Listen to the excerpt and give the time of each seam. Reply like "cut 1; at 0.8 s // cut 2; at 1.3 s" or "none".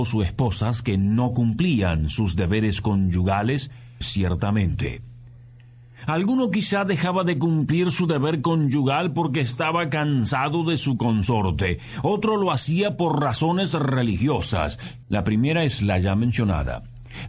cut 1; at 4.0 s // cut 2; at 15.0 s

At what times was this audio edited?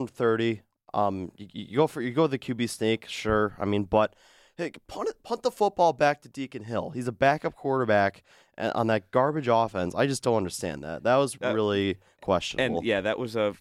none

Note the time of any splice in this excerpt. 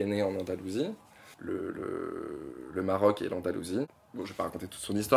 cut 1; at 1.3 s

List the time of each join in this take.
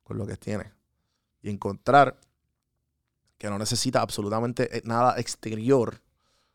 none

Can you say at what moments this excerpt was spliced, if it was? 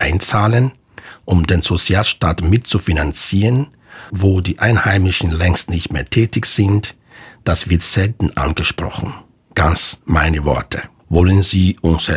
cut 1; at 4.1 s // cut 2; at 9.4 s // cut 3; at 11.0 s

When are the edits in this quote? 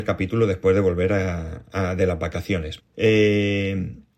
cut 1; at 2.8 s

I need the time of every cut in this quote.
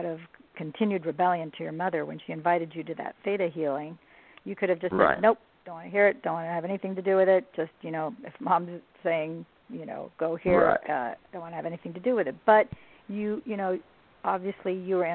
none

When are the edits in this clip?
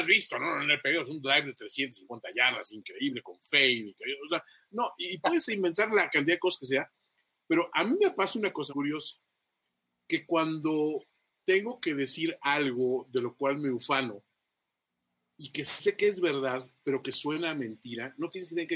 cut 1; at 8.7 s

